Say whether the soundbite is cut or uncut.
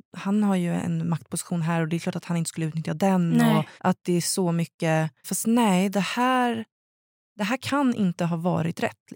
cut